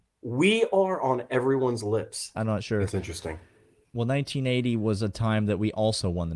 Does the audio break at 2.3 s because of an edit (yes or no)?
yes